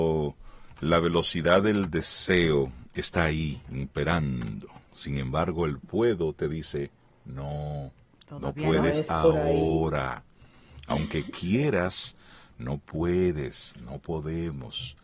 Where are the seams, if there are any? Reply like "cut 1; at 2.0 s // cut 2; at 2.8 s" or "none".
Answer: none